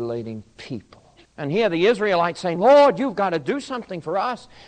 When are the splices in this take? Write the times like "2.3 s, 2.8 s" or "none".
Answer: 1.3 s, 2.6 s